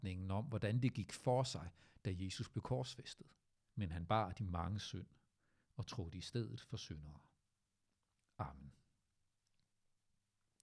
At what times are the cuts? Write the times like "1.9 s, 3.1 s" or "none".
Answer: 3.7 s